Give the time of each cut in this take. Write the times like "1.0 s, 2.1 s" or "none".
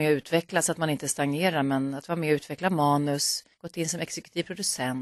none

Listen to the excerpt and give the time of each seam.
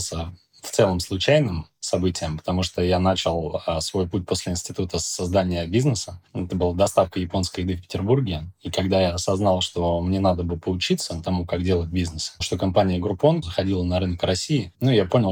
12.4 s, 13.4 s

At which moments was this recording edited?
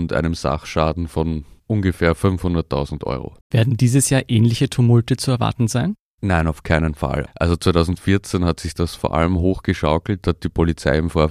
3.4 s, 7.3 s

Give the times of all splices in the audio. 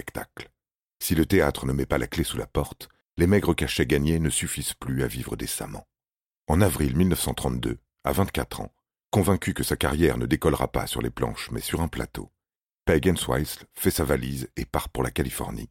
0.9 s, 6.3 s

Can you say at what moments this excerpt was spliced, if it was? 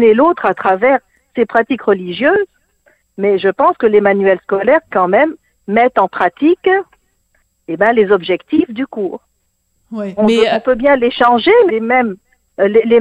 10.2 s, 11.7 s

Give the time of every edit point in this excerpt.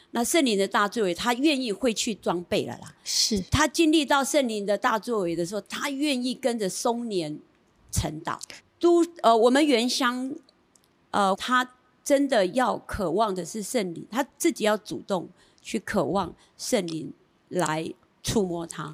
8.6 s, 11.4 s

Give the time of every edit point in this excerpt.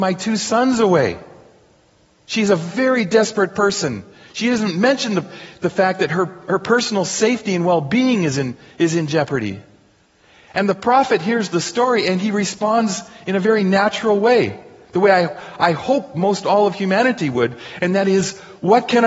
none

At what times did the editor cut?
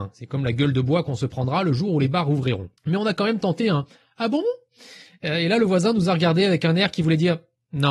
2.8 s

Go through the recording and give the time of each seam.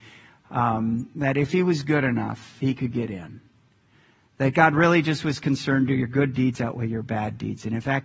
none

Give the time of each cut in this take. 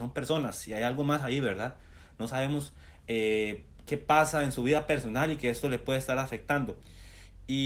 none

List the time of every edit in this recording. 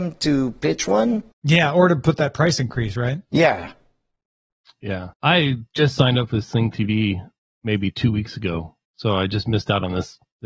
1.3 s, 5.1 s

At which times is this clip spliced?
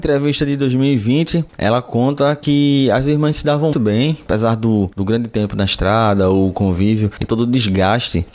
3.7 s

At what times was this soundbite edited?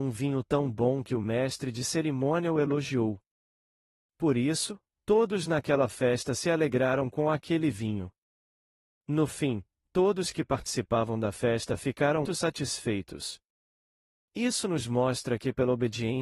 12.3 s

